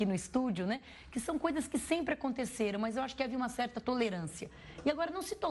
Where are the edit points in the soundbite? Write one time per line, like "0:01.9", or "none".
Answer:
none